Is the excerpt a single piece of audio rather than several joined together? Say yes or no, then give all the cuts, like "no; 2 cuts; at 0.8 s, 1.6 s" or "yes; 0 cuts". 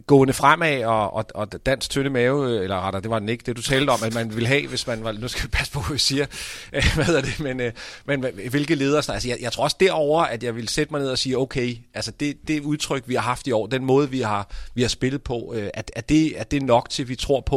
yes; 0 cuts